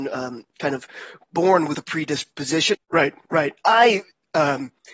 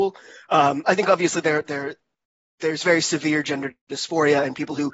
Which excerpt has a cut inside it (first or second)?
first